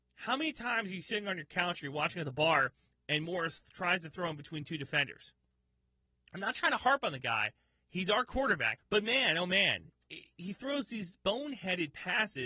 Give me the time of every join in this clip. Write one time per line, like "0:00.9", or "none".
0:08.8
0:11.1